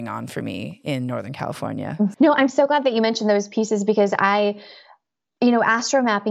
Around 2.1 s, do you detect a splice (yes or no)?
yes